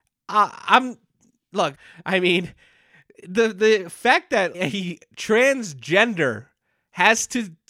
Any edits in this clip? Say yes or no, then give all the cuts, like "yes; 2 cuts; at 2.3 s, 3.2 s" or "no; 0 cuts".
yes; 2 cuts; at 1.7 s, 4.5 s